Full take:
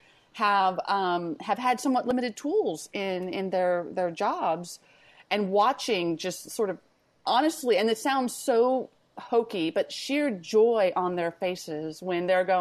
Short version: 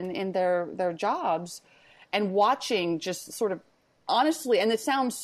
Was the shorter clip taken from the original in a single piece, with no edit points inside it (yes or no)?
yes